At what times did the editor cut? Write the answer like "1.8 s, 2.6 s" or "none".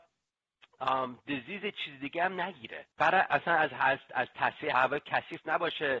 2.9 s, 4.7 s